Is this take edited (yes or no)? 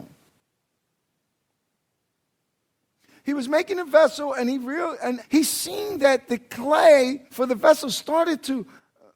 yes